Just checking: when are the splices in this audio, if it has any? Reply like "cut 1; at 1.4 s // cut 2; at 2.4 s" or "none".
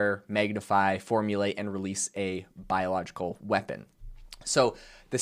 none